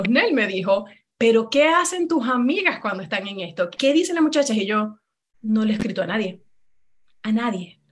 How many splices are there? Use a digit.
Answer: 2